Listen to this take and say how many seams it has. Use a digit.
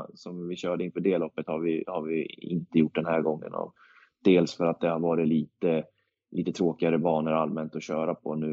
0